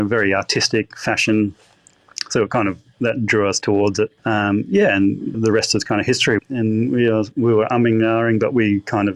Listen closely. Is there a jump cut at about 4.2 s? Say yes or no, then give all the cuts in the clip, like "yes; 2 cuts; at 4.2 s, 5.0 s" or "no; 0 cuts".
yes; 3 cuts; at 4.2 s, 5.3 s, 6.4 s